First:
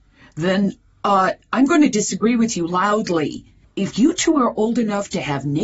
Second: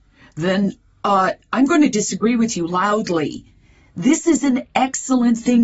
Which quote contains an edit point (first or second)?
first